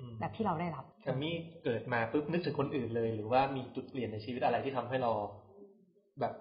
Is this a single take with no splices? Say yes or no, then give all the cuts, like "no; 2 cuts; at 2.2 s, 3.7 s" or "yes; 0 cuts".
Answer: no; 1 cut; at 0.9 s